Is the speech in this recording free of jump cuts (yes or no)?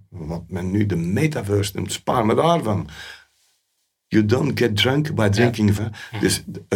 no